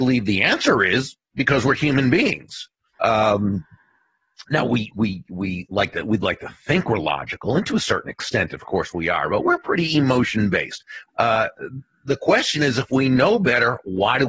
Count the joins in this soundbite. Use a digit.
2